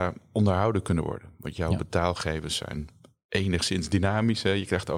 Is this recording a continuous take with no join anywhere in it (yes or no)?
yes